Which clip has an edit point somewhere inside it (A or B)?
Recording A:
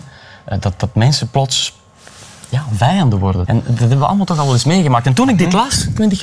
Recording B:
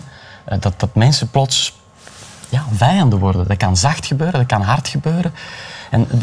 A